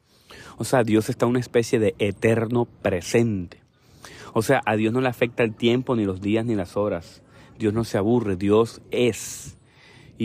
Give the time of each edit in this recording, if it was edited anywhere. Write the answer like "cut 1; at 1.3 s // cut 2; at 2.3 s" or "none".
none